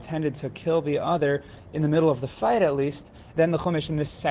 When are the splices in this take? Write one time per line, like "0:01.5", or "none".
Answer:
0:03.3